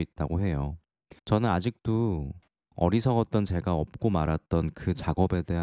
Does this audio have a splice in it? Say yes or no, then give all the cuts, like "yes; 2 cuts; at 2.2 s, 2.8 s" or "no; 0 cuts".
yes; 1 cut; at 1.2 s